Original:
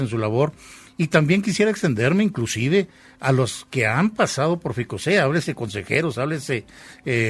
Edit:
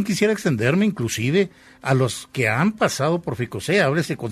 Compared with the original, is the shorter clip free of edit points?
yes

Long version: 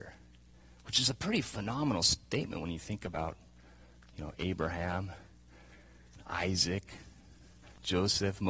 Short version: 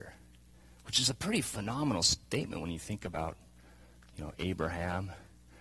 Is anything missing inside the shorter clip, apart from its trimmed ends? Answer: no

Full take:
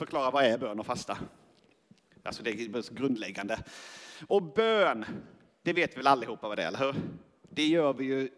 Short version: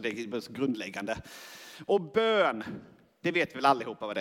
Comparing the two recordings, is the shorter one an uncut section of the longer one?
yes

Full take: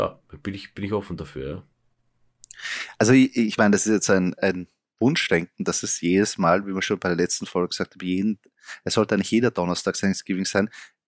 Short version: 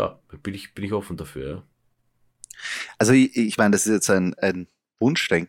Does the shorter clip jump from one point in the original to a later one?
no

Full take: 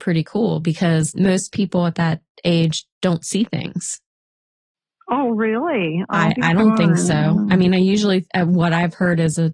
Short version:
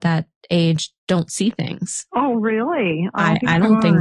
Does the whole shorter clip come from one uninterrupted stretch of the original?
no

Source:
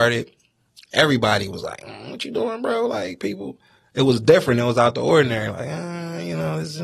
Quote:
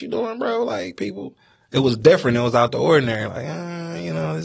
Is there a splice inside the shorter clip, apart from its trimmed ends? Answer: no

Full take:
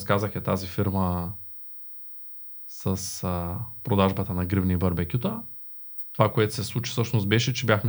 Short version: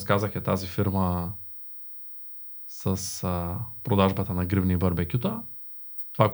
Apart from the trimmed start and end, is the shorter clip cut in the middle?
no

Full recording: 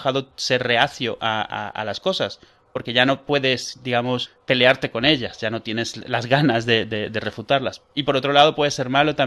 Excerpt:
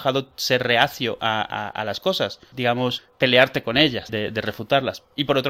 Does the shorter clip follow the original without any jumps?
no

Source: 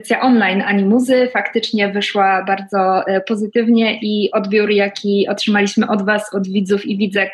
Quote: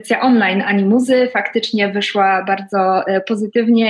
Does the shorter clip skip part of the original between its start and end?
no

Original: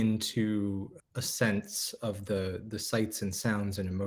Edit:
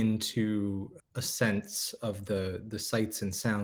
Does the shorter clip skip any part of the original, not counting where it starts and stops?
no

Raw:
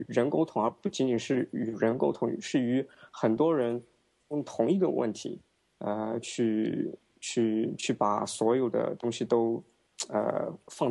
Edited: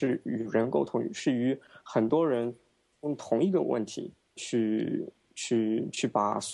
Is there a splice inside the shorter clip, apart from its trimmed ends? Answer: yes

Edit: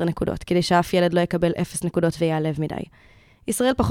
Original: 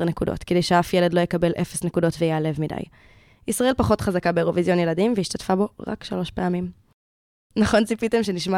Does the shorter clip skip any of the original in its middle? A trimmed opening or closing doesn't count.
no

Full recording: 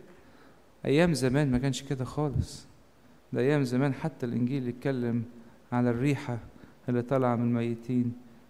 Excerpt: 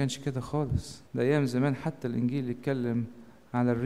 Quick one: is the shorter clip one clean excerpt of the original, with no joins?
no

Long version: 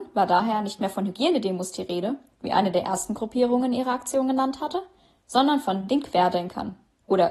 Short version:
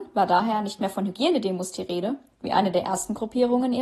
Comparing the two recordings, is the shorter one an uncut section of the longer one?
yes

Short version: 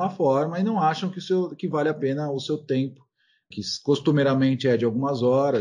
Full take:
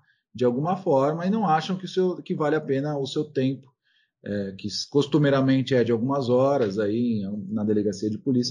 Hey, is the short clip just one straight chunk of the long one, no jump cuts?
no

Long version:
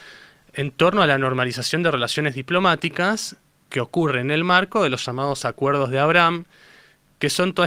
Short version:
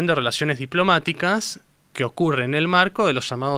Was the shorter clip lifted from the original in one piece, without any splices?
yes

